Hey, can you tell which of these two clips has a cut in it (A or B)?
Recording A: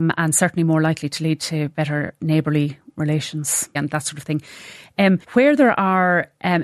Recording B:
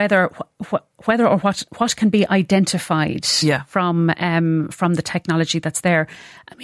A